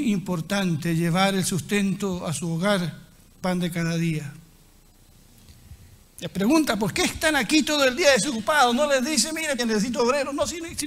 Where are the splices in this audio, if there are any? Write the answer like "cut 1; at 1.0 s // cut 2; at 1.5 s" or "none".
cut 1; at 3.3 s // cut 2; at 6.0 s // cut 3; at 9.6 s